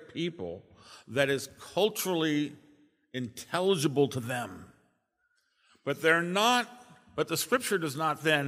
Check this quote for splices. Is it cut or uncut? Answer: uncut